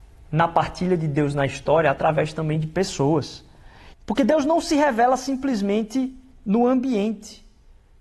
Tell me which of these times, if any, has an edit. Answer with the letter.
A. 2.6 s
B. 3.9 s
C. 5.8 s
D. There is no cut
B